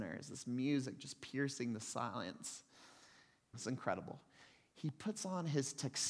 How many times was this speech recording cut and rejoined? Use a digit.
1